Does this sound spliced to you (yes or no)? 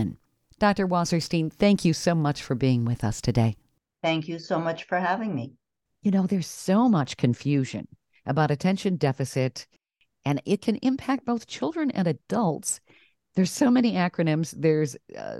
no